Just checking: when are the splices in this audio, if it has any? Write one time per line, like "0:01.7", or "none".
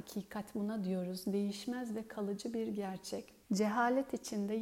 0:03.4